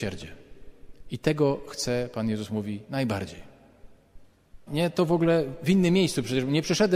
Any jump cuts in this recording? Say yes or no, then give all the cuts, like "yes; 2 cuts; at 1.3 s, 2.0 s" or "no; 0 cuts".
yes; 1 cut; at 4.7 s